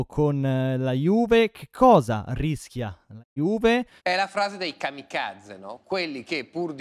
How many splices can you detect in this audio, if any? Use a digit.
1